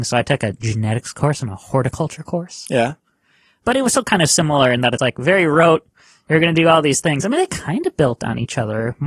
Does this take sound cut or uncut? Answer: uncut